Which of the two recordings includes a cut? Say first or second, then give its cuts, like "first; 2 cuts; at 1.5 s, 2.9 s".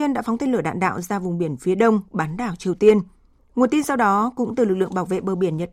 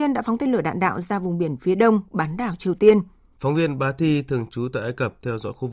second; 1 cut; at 3.4 s